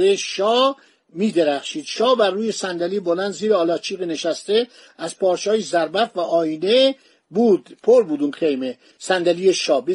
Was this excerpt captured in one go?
no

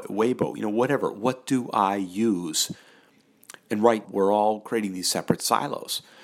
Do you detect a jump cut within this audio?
yes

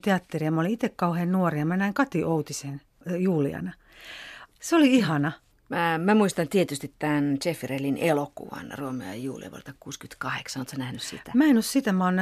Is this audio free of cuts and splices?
no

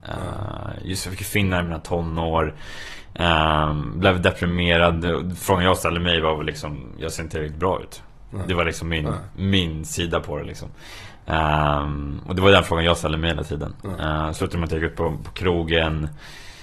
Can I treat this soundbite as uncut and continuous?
yes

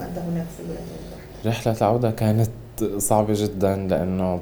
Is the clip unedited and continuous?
no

